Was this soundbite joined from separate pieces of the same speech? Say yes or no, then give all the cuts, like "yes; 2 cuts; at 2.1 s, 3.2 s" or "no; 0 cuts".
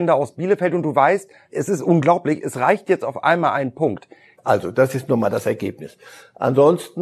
yes; 1 cut; at 4.4 s